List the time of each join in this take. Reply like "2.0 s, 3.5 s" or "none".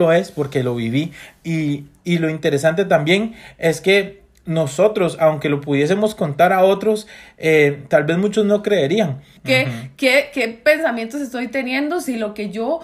9.4 s